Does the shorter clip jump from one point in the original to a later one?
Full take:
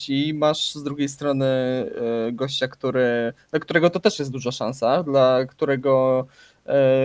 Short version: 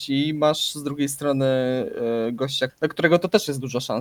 yes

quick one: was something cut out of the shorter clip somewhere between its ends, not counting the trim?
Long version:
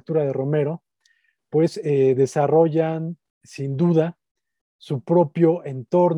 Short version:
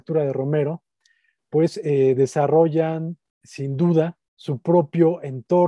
yes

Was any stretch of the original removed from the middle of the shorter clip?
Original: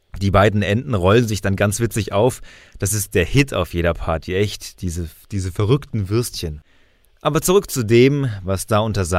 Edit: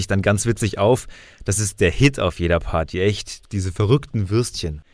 yes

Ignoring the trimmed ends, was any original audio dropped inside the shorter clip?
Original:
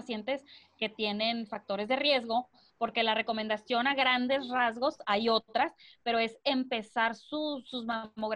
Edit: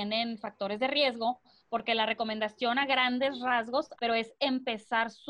yes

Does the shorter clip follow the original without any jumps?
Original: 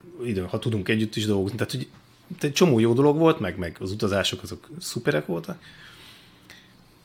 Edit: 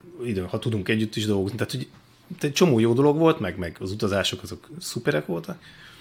yes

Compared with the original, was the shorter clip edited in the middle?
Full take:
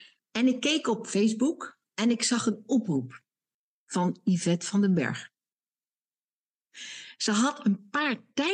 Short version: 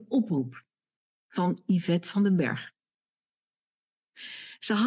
no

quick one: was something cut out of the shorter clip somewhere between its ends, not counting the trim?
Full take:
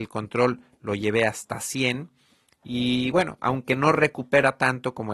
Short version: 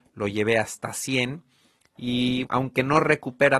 yes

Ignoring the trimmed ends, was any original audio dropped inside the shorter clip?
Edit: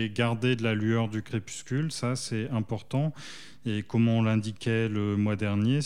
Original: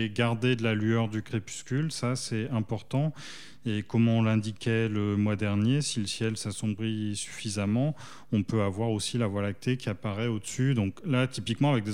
no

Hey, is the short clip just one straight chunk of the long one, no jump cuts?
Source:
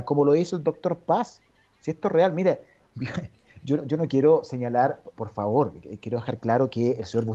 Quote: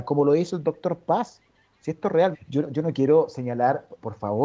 no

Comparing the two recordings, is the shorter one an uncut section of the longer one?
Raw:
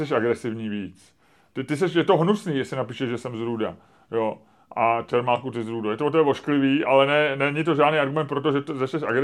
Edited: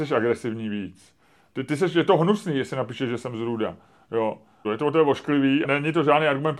no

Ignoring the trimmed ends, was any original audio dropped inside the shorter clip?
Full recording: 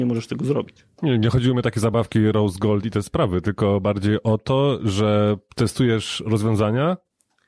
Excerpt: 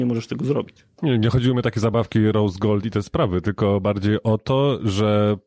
no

